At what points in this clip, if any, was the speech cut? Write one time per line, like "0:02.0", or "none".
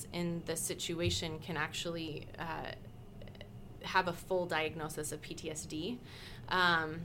none